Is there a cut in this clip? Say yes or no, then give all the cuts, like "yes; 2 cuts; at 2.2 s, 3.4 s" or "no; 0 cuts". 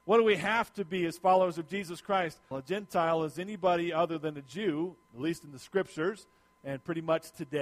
yes; 2 cuts; at 2.5 s, 5.0 s